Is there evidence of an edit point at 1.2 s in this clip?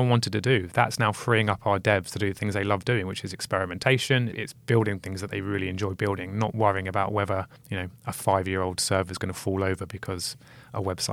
no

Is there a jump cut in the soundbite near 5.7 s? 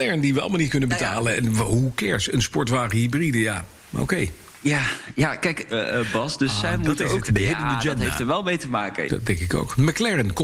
yes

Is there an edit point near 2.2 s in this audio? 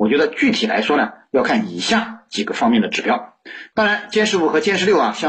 no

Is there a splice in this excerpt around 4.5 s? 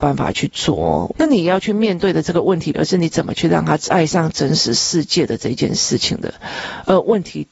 no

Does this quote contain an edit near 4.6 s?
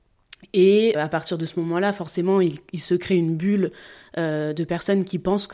no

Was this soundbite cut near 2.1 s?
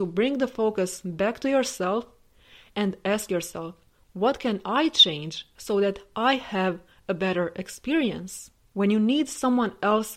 no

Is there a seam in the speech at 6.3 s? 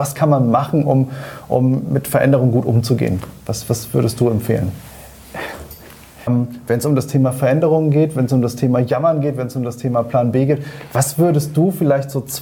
yes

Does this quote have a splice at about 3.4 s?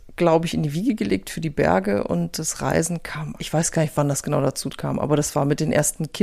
yes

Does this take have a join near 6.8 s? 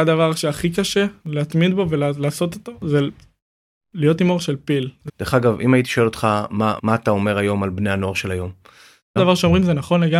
yes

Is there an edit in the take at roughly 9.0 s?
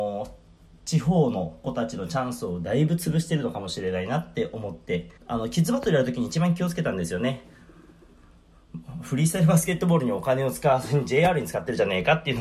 no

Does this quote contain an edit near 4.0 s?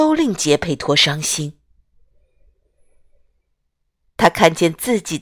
yes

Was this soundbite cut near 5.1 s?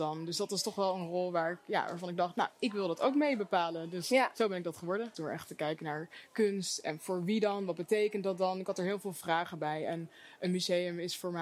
yes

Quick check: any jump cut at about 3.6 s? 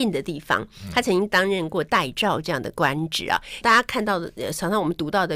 yes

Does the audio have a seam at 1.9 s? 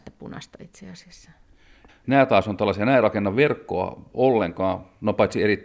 yes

